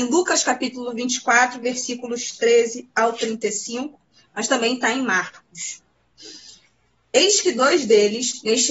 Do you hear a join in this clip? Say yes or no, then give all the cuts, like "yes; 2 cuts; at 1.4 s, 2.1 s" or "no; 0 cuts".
no; 0 cuts